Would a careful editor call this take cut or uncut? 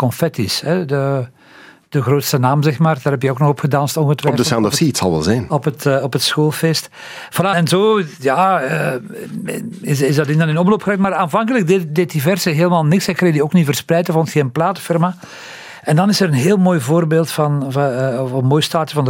cut